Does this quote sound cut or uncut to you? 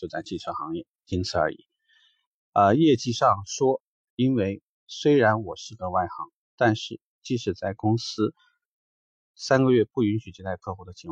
uncut